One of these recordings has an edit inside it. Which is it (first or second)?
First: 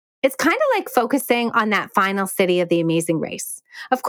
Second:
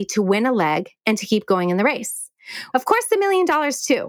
second